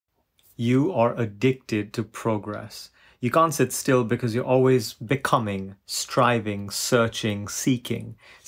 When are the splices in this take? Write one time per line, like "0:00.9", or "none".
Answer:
none